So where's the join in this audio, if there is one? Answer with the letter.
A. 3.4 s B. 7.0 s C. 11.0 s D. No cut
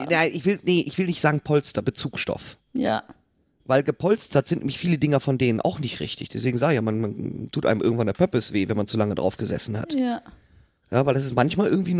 D